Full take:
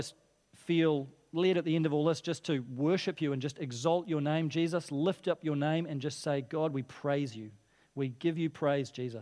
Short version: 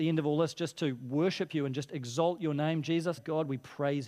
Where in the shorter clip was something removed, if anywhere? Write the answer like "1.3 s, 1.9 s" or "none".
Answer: 3.2 s